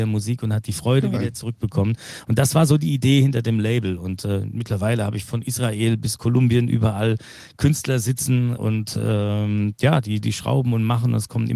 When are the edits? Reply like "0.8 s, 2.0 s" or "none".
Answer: 8.6 s